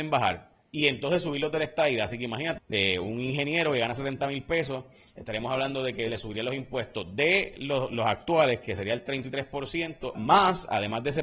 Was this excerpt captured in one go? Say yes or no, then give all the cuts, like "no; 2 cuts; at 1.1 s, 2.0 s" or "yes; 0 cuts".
no; 2 cuts; at 2.6 s, 10.1 s